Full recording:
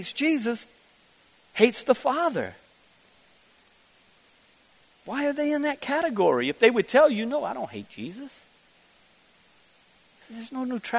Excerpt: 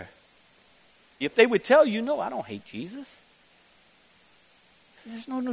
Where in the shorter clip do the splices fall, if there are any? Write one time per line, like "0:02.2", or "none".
0:01.2